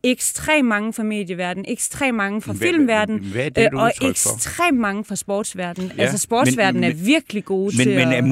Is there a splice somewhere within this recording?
no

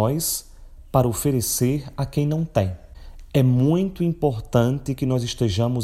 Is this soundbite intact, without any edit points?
yes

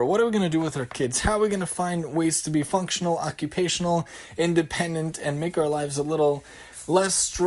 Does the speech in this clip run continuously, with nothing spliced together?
yes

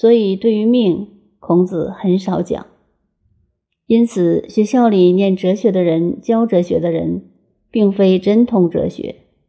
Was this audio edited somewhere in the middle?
no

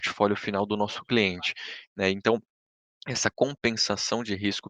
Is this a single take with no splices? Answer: no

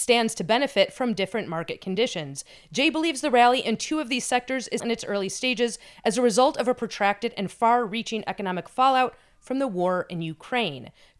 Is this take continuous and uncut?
no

